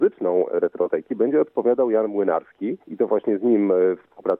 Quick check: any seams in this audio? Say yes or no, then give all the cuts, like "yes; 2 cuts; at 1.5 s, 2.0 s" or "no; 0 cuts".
yes; 1 cut; at 2.8 s